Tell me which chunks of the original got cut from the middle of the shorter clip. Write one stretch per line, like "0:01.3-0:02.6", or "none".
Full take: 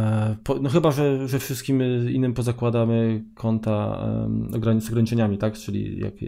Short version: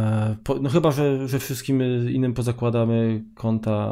none